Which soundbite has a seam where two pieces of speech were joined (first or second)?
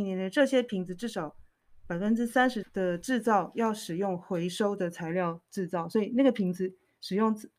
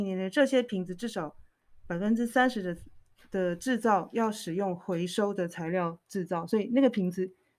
first